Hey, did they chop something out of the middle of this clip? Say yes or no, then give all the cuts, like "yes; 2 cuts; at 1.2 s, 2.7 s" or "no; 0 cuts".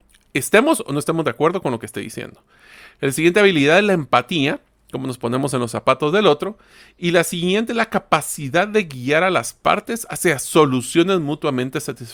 no; 0 cuts